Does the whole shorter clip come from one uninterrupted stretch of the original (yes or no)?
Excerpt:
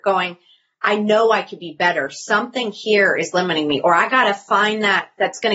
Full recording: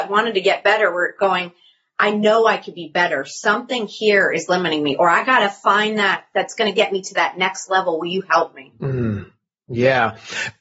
yes